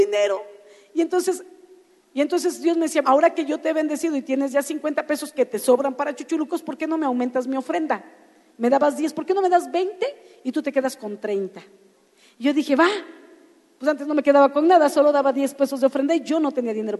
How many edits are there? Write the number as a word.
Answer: one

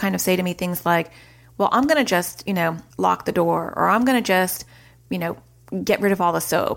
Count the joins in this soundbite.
one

